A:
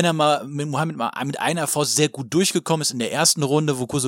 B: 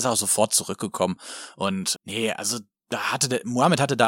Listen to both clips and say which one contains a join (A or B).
B